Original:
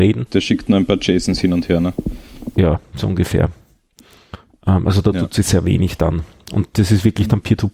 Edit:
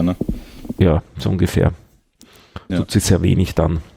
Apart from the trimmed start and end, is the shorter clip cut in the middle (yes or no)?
yes